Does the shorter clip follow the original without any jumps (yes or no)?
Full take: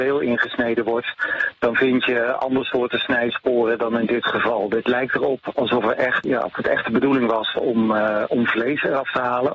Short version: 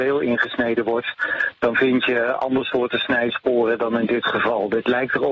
yes